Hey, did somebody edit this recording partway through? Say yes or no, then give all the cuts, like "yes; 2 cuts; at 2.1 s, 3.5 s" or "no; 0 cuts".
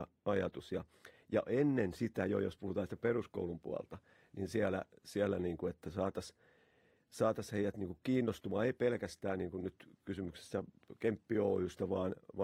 no; 0 cuts